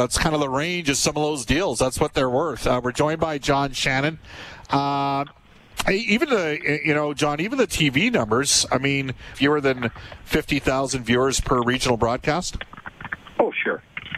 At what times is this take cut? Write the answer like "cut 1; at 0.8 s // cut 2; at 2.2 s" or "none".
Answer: cut 1; at 9.3 s